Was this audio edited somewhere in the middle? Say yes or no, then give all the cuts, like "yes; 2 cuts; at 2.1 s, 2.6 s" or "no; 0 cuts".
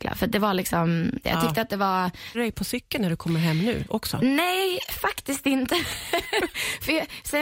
yes; 2 cuts; at 1.2 s, 2.3 s